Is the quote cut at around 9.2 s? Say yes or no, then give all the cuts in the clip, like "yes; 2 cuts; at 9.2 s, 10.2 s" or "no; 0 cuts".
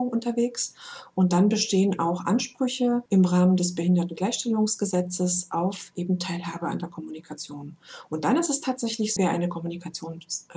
yes; 2 cuts; at 3.1 s, 9.2 s